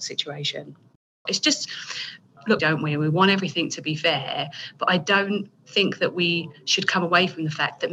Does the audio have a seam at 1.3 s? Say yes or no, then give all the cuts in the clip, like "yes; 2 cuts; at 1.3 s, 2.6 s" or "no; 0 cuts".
yes; 2 cuts; at 1.3 s, 2.6 s